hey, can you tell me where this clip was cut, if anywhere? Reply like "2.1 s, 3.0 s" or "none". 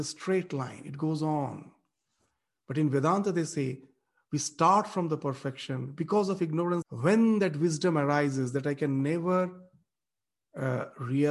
6.8 s